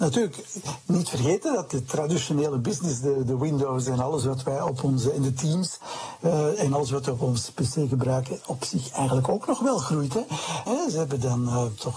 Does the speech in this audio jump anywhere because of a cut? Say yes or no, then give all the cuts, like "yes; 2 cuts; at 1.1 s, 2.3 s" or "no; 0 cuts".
yes; 1 cut; at 10.7 s